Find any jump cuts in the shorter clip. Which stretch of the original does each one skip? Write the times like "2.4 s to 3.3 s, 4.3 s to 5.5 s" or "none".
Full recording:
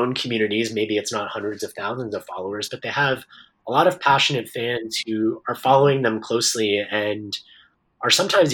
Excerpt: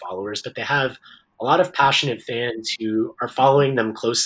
none